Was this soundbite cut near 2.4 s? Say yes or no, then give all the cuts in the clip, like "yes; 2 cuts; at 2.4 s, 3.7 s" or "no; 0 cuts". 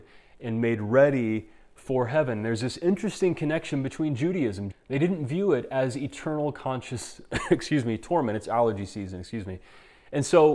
no; 1 cut; at 4.7 s